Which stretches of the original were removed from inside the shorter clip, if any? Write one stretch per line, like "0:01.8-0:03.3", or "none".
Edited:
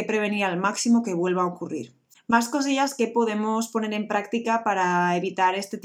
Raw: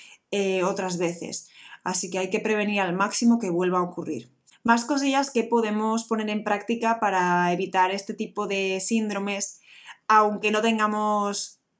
none

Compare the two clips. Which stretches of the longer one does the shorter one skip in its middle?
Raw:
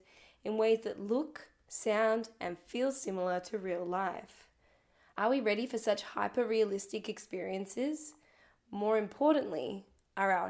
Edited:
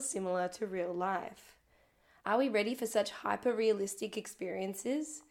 none

